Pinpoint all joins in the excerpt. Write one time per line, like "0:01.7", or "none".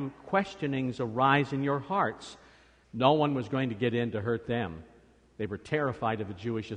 0:02.8